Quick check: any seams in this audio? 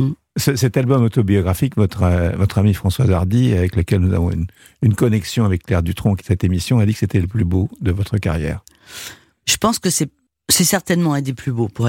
yes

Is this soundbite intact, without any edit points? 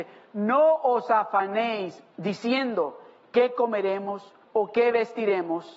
no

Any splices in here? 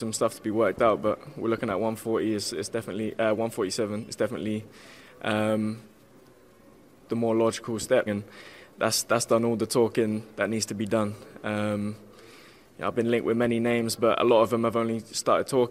yes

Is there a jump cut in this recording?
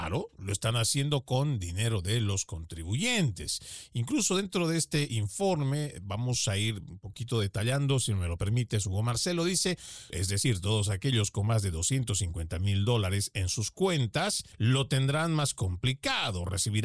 yes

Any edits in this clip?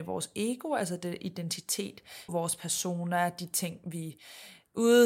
yes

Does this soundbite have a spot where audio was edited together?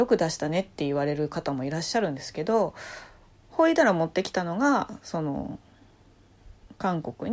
yes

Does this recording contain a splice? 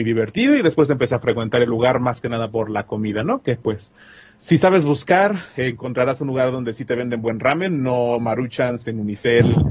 no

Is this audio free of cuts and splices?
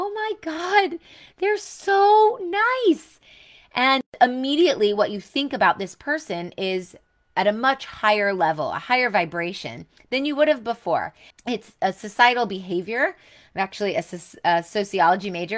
no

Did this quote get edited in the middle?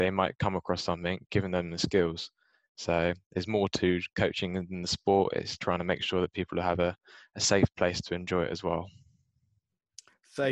no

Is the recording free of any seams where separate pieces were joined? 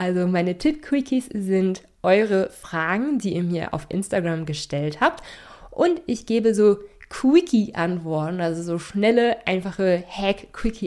yes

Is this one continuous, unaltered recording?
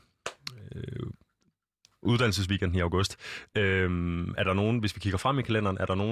yes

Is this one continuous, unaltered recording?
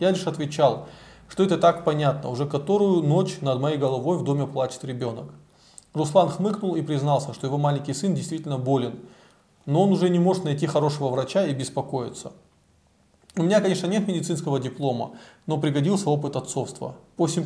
yes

